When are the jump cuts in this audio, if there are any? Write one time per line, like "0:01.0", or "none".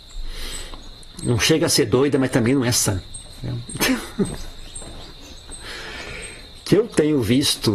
none